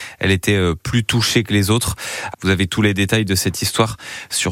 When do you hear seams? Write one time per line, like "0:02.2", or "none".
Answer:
0:02.3